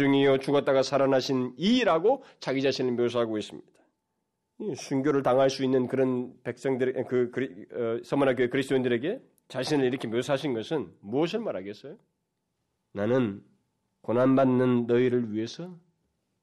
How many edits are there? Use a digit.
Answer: 0